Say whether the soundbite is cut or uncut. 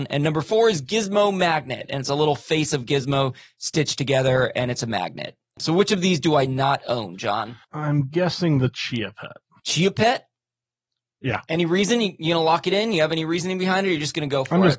cut